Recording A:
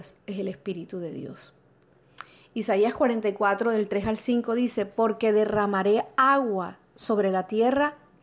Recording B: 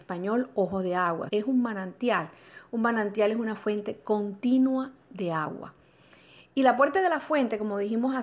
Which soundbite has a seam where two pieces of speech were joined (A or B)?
B